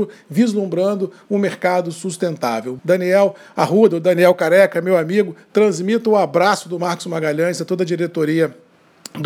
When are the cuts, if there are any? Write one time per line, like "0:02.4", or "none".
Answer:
0:02.8